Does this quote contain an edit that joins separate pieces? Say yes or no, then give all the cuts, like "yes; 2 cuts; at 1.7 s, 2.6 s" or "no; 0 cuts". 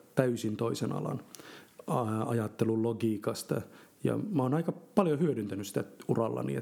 no; 0 cuts